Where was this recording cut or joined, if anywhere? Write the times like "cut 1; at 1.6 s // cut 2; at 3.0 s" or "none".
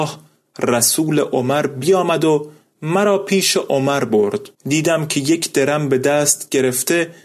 cut 1; at 4.5 s

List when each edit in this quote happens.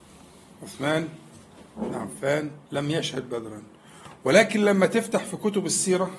cut 1; at 2.6 s

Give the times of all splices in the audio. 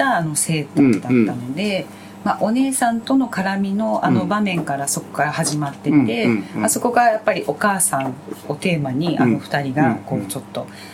none

